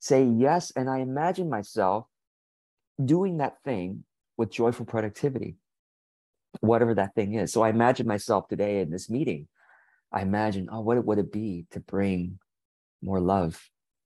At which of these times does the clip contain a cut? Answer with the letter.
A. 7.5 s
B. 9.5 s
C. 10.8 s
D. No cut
D